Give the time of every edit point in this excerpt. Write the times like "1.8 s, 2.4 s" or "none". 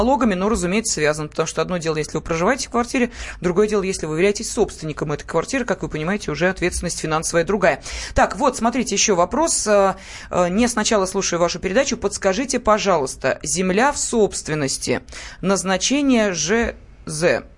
none